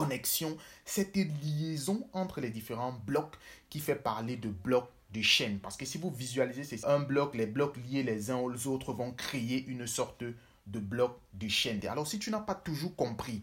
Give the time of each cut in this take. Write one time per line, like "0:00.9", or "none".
0:06.8
0:11.8